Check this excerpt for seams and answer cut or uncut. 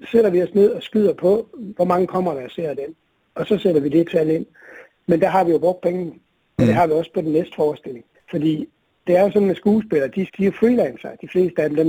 cut